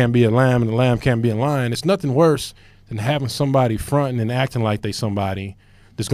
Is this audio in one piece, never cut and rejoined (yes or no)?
yes